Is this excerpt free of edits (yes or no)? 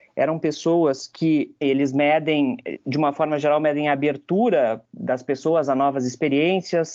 no